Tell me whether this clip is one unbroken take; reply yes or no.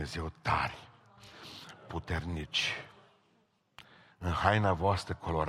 yes